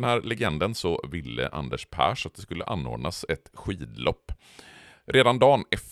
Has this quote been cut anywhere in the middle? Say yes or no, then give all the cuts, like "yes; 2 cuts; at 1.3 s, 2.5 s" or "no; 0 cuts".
no; 0 cuts